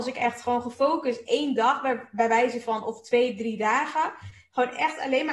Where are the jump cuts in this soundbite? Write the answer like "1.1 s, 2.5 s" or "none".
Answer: none

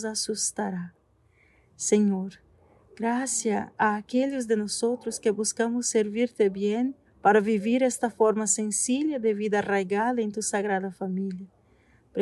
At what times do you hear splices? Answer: 7.0 s

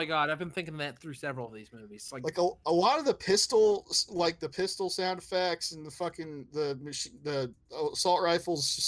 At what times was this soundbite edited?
none

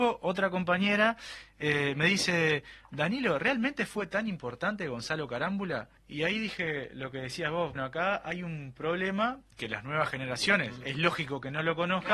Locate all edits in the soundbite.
6.0 s, 7.8 s

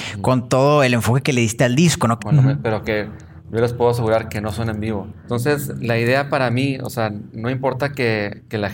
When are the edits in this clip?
2.2 s, 5.3 s

